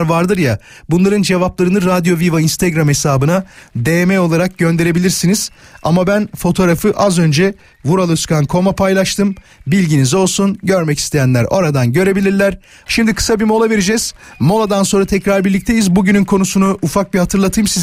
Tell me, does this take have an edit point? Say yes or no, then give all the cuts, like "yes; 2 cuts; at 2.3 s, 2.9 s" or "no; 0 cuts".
yes; 1 cut; at 12.9 s